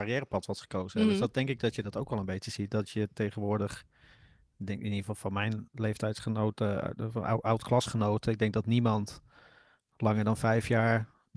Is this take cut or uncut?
uncut